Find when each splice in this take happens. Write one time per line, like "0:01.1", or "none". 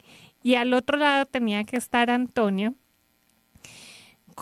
none